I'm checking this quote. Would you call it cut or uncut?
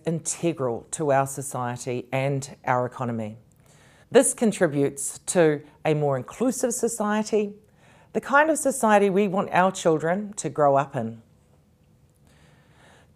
cut